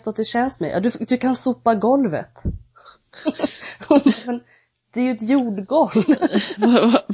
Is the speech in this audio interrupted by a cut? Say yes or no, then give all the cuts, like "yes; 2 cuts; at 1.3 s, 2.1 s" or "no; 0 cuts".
no; 0 cuts